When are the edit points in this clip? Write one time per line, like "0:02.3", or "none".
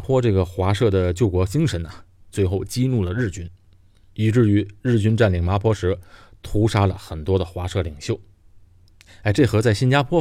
none